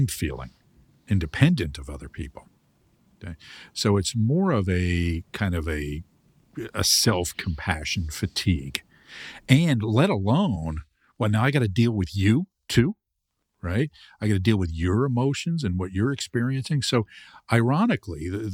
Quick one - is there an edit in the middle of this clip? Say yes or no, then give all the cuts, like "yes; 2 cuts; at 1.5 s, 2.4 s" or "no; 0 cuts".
no; 0 cuts